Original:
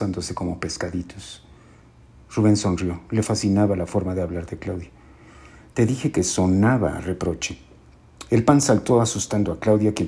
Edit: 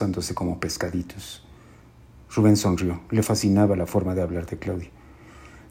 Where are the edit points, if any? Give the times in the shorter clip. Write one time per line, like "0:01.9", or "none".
none